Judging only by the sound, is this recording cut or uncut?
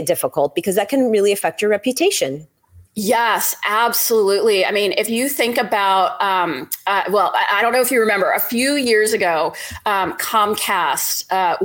uncut